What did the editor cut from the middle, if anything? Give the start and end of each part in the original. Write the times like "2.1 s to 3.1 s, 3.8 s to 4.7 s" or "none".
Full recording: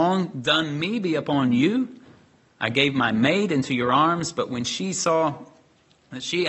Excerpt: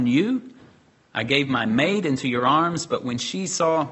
none